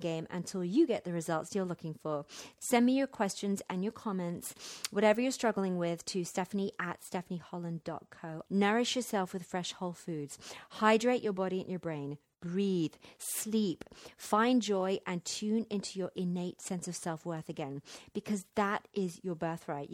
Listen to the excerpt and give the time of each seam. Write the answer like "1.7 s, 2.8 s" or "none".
2.6 s, 8.5 s